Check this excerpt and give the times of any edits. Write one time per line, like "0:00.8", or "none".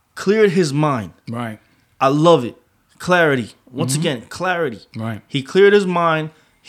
none